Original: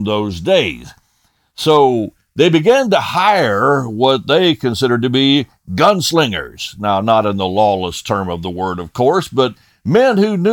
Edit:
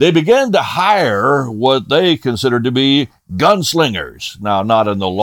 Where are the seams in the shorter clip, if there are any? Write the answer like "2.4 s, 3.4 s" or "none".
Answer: none